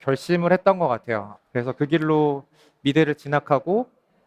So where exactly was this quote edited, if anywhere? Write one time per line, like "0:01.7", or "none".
0:01.4